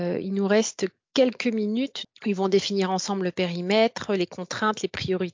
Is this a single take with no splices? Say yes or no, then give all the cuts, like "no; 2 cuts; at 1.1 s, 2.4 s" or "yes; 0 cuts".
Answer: no; 1 cut; at 2.0 s